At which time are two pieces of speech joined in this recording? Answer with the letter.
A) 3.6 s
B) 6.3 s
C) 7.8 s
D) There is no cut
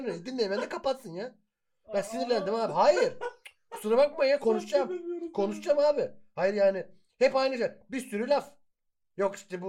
D